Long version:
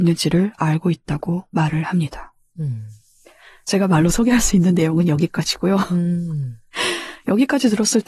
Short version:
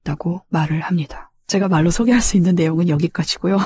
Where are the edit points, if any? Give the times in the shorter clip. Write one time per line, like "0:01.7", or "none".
0:01.4